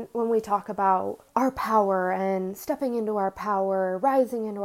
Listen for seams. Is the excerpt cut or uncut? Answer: cut